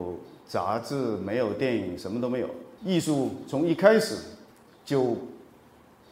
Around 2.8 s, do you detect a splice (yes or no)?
yes